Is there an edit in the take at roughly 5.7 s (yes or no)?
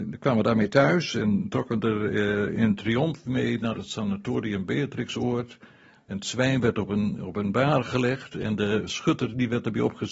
no